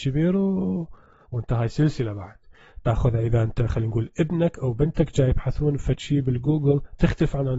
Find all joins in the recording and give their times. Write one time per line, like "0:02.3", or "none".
0:01.2